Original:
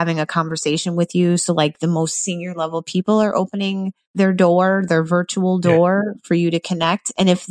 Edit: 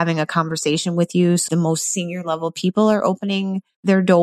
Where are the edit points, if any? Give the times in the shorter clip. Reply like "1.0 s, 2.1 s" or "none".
1.5 s